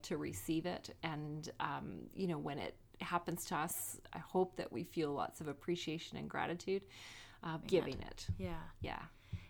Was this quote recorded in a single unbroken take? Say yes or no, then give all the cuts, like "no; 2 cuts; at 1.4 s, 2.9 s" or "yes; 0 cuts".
no; 1 cut; at 7.6 s